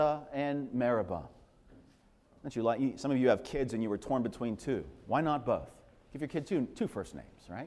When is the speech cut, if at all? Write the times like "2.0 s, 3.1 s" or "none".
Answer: none